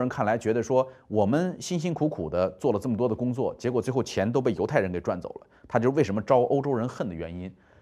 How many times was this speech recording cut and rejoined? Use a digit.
0